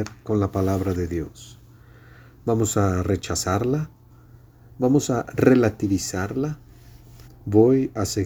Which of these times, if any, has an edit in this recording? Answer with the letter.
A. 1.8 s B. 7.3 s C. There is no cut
B